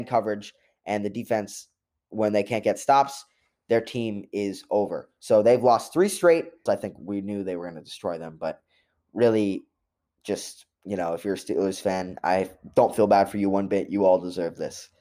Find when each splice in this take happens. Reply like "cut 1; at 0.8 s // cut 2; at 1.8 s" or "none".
cut 1; at 6.7 s